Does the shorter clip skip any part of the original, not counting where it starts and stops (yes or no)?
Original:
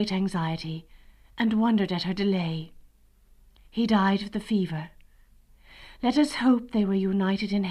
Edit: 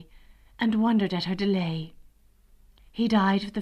no